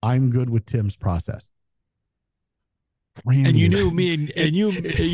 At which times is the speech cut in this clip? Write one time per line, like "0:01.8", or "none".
0:03.2

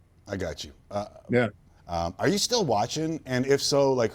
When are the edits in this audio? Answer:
0:01.8

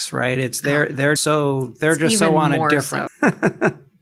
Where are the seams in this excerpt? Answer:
0:01.2
0:03.1

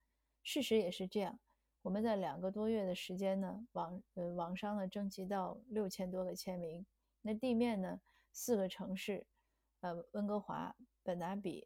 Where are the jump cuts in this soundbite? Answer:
none

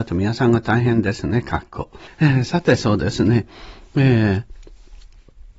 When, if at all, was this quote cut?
0:02.1

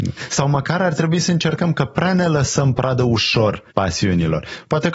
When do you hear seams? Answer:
0:03.7

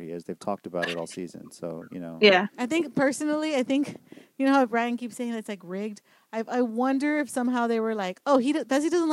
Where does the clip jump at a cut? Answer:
none

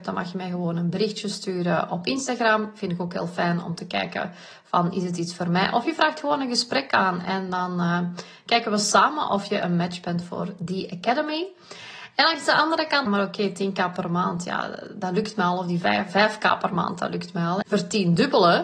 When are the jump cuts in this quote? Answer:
0:13.1
0:17.6

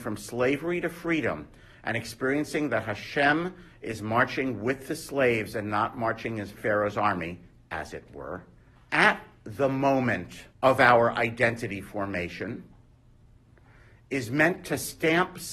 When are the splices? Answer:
0:08.8
0:10.5

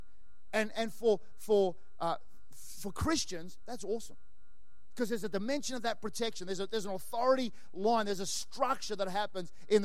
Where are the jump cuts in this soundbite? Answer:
none

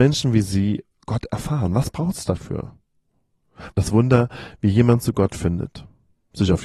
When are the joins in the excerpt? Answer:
0:03.7

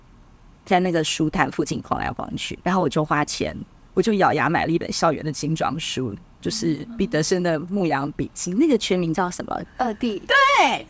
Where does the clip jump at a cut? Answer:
0:02.6
0:09.7

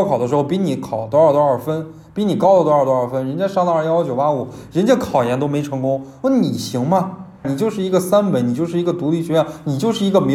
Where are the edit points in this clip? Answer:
0:07.4

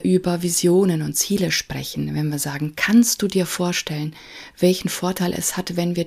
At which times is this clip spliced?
none

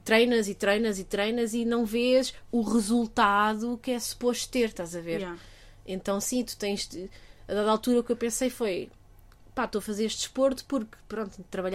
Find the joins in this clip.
none

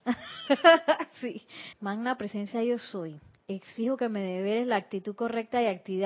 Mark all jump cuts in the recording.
0:01.7

